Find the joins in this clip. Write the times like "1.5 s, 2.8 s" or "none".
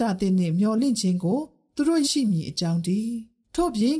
2.0 s